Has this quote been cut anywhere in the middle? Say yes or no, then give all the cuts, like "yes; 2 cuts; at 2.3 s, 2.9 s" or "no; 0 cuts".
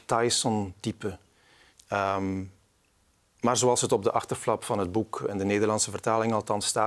yes; 1 cut; at 1.7 s